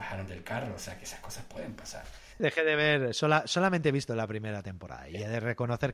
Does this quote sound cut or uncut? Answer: cut